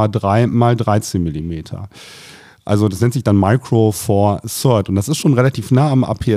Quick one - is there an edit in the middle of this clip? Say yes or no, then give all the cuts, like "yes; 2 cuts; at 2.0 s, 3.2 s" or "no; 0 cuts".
no; 0 cuts